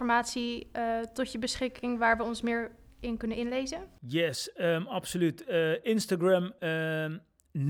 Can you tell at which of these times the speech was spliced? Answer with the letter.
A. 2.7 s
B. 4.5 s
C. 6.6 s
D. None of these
D